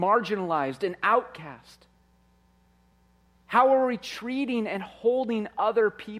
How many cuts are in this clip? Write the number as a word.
zero